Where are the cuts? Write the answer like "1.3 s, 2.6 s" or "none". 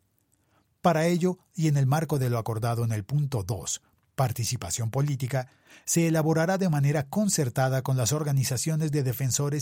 none